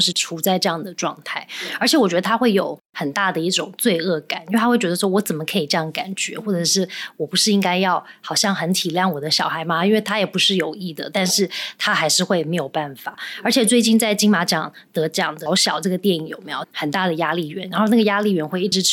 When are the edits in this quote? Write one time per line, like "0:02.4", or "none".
0:15.5
0:16.6